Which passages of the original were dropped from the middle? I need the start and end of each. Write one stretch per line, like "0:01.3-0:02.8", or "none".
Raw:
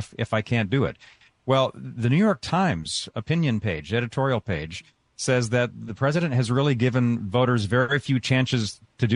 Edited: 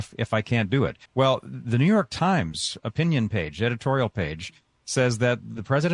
0:01.1-0:01.4